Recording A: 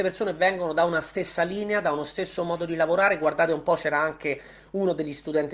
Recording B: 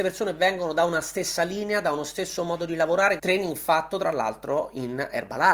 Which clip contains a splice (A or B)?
B